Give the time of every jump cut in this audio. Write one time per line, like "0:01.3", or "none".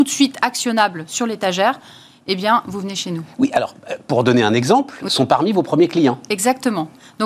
0:05.1